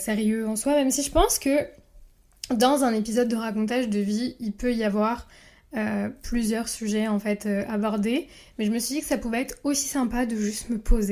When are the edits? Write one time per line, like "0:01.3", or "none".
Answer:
none